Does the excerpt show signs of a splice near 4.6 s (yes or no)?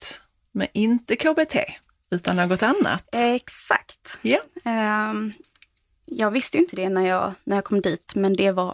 no